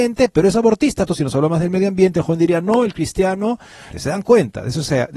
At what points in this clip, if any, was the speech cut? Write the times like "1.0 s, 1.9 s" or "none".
1.1 s, 3.9 s

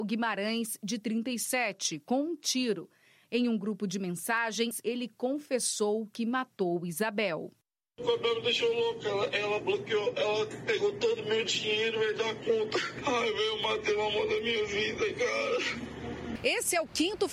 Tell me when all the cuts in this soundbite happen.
3.2 s

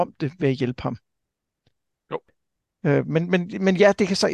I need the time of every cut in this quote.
1.9 s

